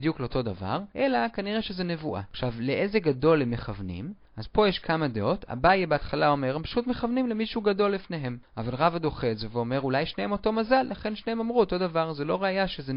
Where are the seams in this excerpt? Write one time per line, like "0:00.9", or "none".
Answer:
none